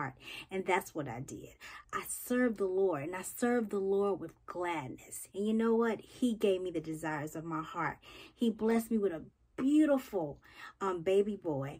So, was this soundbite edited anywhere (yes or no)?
yes